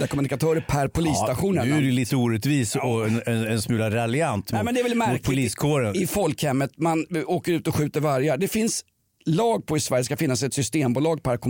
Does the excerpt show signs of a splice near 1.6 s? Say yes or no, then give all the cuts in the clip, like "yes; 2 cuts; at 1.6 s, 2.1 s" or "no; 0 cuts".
no; 0 cuts